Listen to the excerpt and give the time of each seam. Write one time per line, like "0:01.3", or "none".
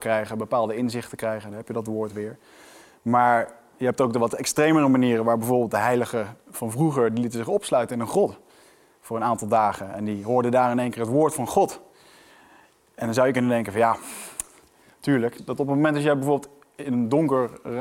0:15.4